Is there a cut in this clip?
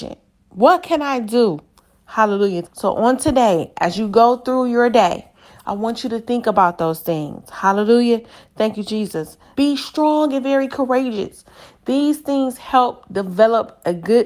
yes; 2 cuts; at 2.6 s, 9.5 s

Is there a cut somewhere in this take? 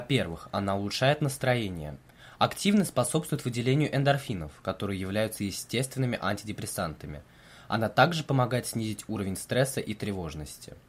no; 0 cuts

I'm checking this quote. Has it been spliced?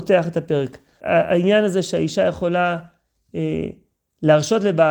yes; 1 cut; at 1.0 s

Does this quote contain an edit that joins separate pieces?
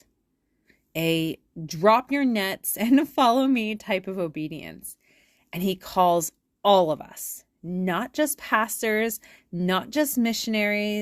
no; 0 cuts

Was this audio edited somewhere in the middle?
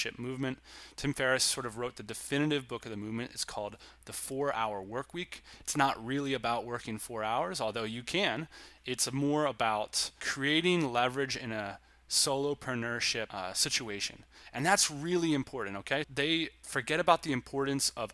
yes; 1 cut; at 16.0 s

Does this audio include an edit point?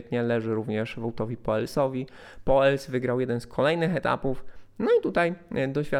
no; 0 cuts

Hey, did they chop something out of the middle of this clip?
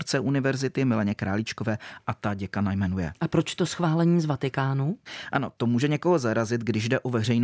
no; 0 cuts

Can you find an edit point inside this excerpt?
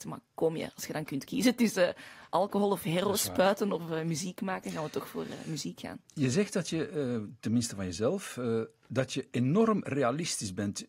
no; 0 cuts

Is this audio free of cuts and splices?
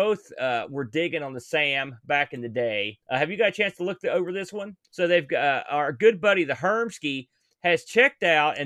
no; 2 cuts; at 3.0 s, 4.8 s

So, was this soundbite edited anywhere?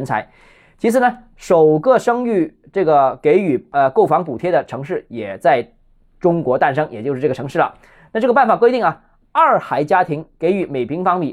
no; 0 cuts

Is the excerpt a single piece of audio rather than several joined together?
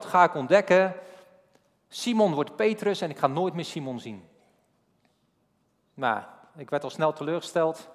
yes; 0 cuts

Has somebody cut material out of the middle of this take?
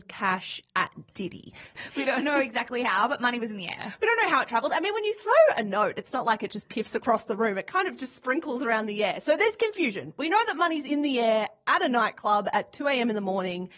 yes; 1 cut; at 1.8 s

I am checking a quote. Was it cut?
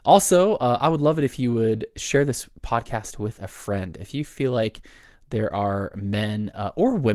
no; 0 cuts

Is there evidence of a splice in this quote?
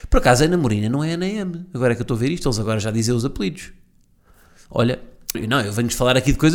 yes; 1 cut; at 5.3 s

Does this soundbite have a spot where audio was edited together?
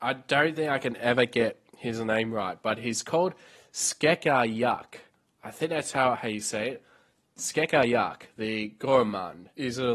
no; 0 cuts

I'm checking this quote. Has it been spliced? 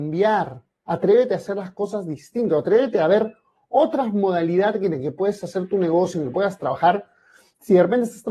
no; 0 cuts

